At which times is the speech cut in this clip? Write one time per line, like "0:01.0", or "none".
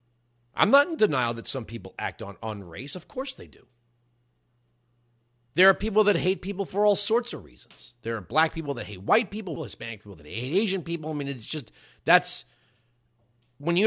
0:09.6